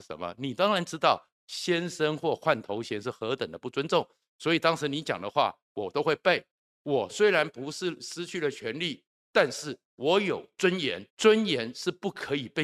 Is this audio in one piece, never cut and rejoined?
no; 2 cuts; at 9.2 s, 11.1 s

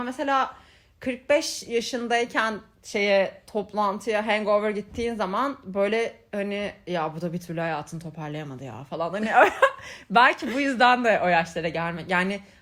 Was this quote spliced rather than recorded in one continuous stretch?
no; 0 cuts

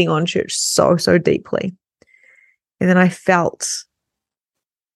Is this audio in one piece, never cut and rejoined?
yes; 0 cuts

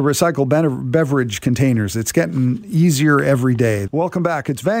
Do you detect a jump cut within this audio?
yes; 1 cut; at 3.9 s

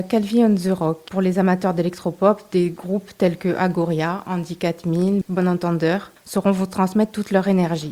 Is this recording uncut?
no; 1 cut; at 5.2 s

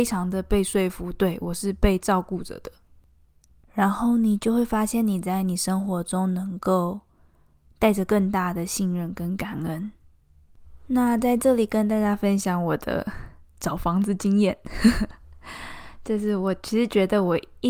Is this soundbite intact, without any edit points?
yes; 0 cuts

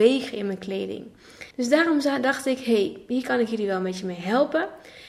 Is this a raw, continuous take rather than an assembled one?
no; 1 cut; at 1.5 s

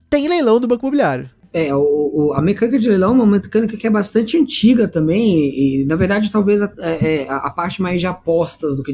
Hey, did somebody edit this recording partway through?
no; 0 cuts

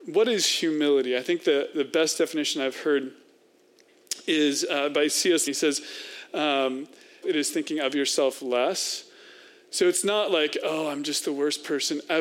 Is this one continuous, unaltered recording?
no; 2 cuts; at 5.5 s, 7.2 s

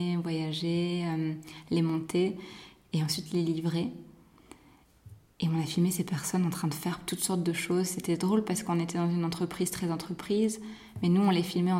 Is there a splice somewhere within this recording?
no; 0 cuts

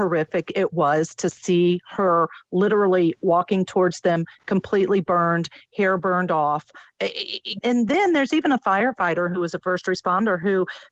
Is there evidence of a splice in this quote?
yes; 1 cut; at 7.6 s

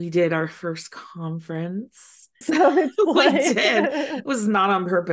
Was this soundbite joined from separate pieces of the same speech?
yes; 1 cut; at 2.4 s

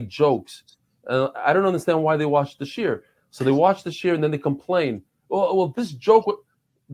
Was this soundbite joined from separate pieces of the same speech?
no; 0 cuts

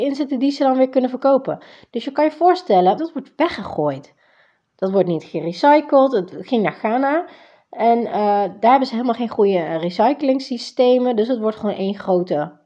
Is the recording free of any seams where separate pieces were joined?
no; 1 cut; at 3.0 s

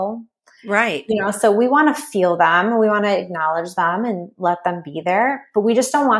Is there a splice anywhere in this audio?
no; 0 cuts

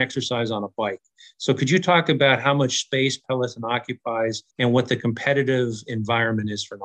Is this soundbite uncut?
no; 1 cut; at 4.5 s

